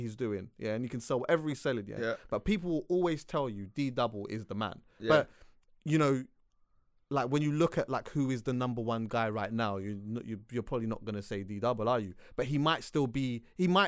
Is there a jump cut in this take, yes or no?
no